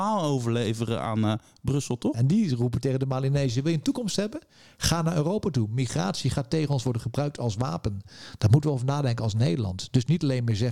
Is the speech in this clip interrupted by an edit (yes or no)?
yes